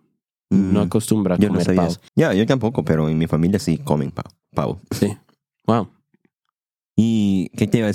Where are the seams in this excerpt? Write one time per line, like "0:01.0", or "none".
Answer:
0:02.1